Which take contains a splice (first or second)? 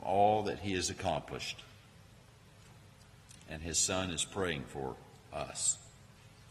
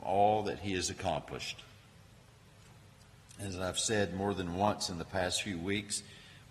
first